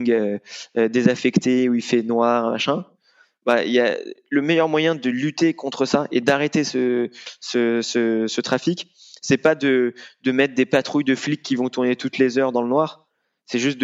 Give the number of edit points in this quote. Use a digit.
0